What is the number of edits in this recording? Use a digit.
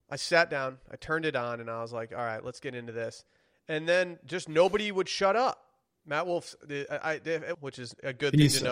2